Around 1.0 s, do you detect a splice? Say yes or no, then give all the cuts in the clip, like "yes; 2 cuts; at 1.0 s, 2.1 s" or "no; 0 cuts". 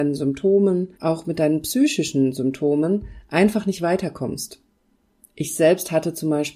yes; 1 cut; at 1.0 s